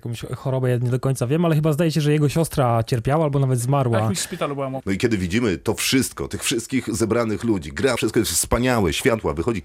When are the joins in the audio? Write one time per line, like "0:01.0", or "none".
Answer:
0:04.8
0:08.0